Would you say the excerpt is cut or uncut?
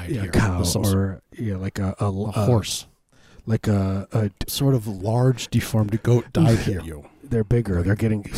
cut